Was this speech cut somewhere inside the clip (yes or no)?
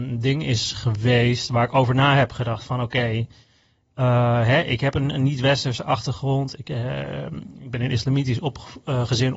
no